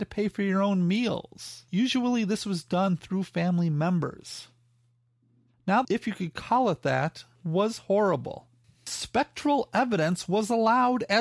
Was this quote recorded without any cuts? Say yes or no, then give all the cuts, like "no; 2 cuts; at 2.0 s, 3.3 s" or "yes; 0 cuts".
no; 2 cuts; at 5.8 s, 8.6 s